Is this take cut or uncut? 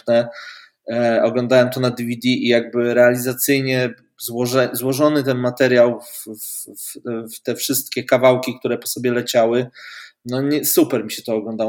uncut